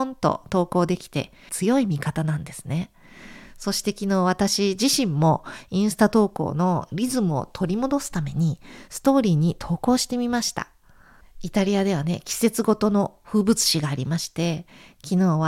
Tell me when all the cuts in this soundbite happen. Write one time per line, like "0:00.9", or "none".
0:01.5